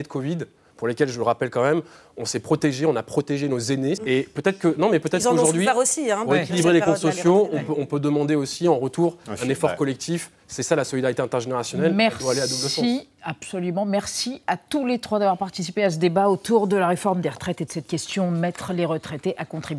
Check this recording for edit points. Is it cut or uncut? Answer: cut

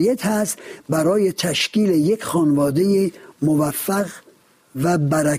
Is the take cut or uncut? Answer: uncut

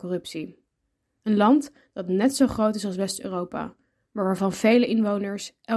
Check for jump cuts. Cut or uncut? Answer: uncut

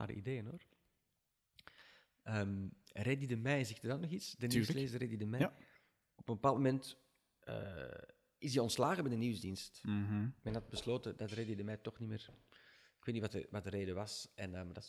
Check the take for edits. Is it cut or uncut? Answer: uncut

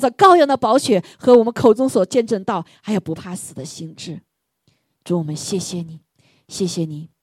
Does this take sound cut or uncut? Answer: uncut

